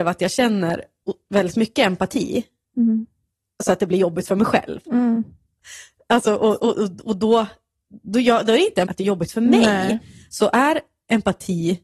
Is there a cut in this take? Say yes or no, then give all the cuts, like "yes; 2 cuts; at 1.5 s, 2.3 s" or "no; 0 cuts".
yes; 1 cut; at 8.9 s